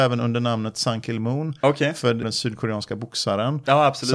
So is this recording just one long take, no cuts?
no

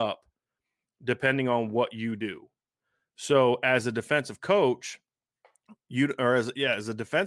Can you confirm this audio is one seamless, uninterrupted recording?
yes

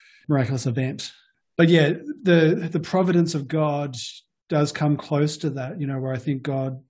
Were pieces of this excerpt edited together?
no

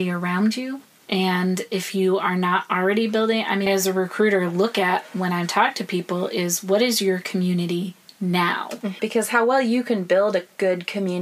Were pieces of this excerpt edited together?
yes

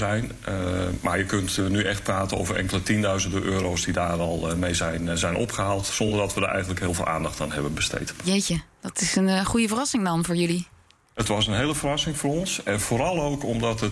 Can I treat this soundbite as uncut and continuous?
yes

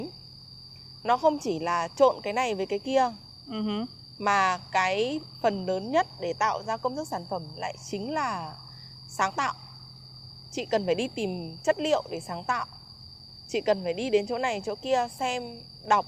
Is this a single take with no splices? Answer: yes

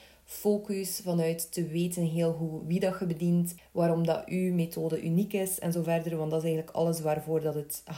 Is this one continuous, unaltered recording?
no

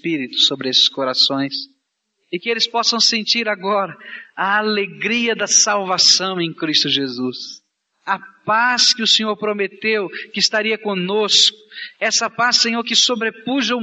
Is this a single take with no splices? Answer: yes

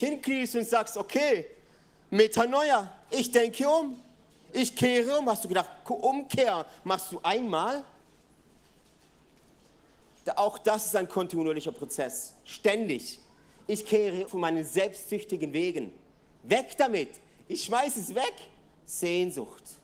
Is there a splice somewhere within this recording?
yes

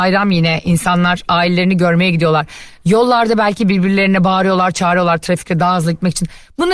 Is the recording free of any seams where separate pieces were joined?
yes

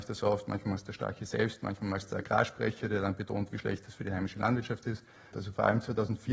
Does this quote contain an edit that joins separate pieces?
yes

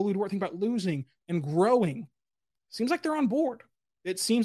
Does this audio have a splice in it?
no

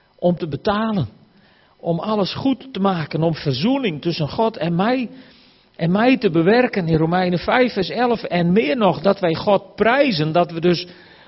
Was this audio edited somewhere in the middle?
no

